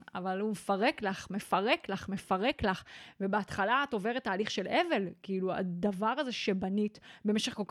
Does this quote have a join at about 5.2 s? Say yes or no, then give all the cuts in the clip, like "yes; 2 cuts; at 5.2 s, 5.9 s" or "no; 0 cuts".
no; 0 cuts